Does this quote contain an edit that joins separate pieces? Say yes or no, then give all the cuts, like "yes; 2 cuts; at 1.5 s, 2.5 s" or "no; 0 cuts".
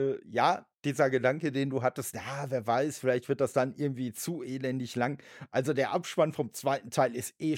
no; 0 cuts